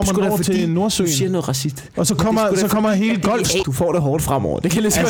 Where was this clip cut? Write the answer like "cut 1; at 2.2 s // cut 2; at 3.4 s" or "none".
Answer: cut 1; at 3.6 s